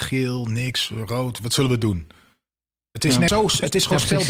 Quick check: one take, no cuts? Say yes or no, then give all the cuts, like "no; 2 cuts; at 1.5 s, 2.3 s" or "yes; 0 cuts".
no; 1 cut; at 3.3 s